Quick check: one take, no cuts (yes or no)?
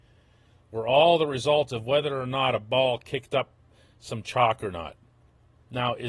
yes